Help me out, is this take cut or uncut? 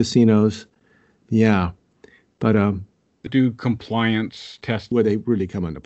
cut